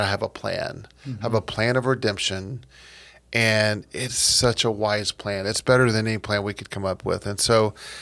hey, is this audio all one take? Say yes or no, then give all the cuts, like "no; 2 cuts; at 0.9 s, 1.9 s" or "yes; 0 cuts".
yes; 0 cuts